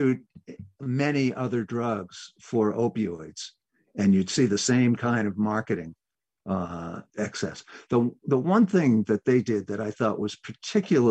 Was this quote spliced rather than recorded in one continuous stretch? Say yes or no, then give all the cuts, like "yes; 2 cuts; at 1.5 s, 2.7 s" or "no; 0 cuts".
no; 0 cuts